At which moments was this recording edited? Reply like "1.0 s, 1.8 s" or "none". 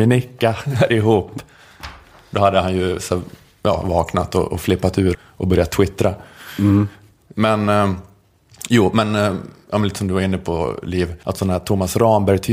5.1 s, 11.2 s